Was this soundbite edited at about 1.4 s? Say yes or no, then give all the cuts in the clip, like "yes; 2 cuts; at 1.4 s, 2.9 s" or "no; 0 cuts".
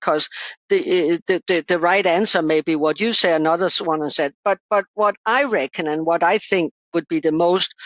yes; 1 cut; at 1.4 s